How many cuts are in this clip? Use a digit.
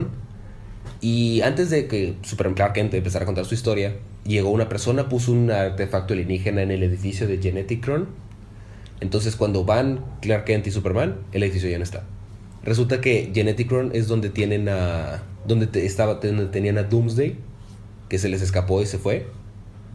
2